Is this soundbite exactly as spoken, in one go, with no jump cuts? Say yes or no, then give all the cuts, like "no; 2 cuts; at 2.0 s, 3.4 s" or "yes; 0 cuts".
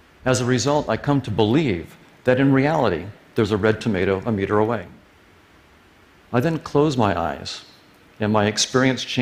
yes; 0 cuts